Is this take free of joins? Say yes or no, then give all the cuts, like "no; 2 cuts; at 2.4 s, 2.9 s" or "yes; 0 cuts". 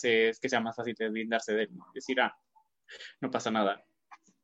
yes; 0 cuts